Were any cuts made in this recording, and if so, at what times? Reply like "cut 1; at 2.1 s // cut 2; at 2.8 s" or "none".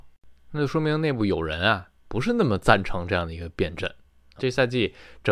cut 1; at 4.4 s